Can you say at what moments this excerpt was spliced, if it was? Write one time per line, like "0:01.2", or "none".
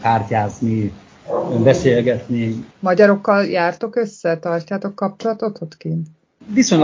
0:02.7